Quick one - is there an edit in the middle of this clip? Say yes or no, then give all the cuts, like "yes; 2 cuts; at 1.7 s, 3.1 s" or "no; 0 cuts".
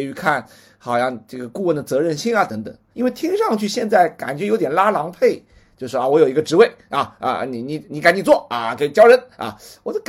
yes; 1 cut; at 2.9 s